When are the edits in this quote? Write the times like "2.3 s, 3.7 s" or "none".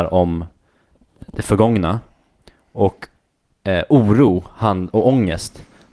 none